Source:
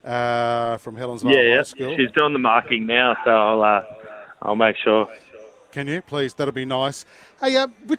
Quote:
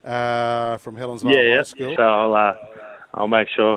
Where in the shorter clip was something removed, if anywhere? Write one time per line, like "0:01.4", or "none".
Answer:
0:02.0

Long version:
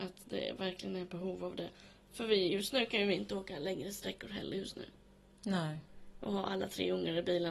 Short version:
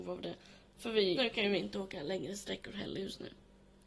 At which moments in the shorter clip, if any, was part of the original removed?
0:01.1

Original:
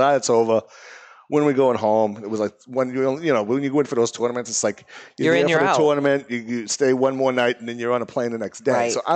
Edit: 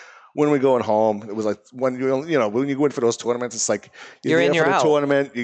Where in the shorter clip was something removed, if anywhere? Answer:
none

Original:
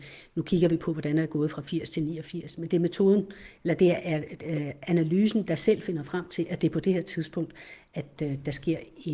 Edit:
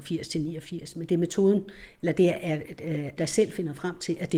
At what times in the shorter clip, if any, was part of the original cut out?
0:03.2

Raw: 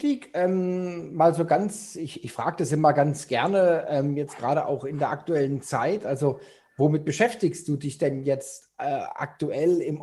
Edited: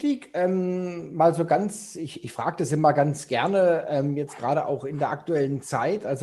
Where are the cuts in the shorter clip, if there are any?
none

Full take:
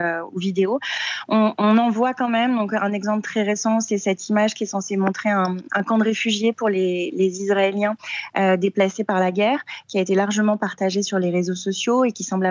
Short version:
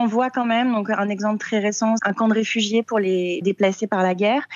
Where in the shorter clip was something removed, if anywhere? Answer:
0:02.0
0:03.4

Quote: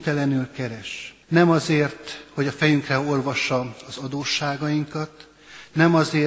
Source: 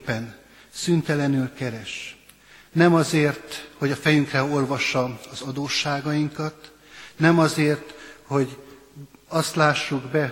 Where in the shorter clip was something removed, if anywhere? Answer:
0:01.2

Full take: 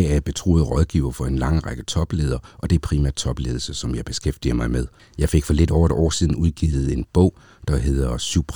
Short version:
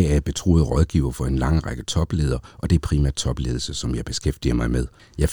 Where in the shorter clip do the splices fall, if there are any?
none

